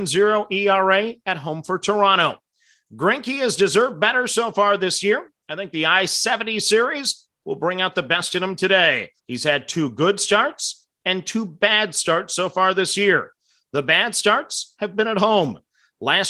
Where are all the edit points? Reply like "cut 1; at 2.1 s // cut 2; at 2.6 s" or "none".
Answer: cut 1; at 9.2 s